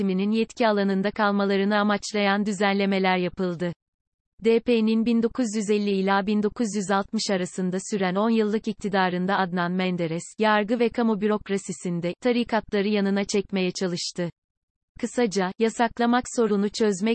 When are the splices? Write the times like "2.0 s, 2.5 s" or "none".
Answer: 10.3 s, 12.2 s